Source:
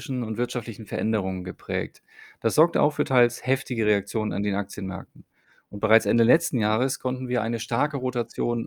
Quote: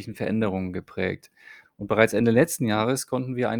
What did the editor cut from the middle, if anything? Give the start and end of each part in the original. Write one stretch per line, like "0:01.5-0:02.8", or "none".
0:02.3-0:05.6